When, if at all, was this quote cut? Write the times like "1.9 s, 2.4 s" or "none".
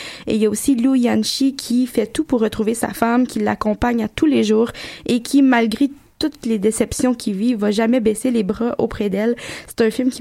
none